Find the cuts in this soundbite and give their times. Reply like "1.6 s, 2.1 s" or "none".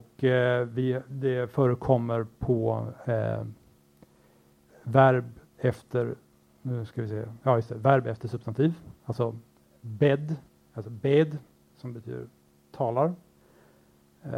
none